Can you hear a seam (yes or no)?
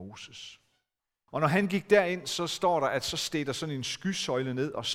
yes